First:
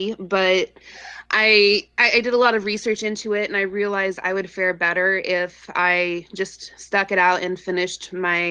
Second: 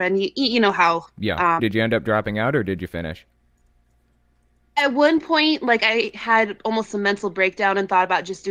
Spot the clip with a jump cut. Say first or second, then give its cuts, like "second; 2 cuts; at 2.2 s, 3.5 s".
second; 1 cut; at 1.6 s